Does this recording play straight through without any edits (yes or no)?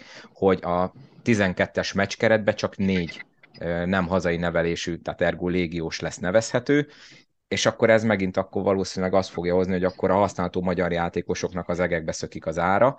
yes